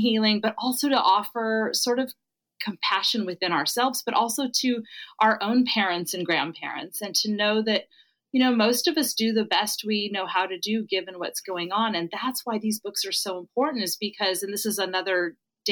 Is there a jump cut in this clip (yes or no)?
no